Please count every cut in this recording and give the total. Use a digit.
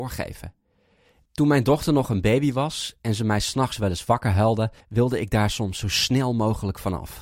2